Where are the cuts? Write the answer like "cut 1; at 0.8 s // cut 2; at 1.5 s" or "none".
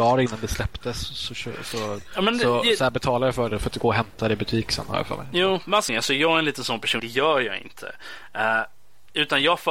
cut 1; at 5.9 s // cut 2; at 7.0 s